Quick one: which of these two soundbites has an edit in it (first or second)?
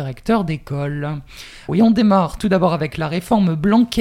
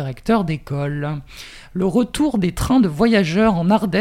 first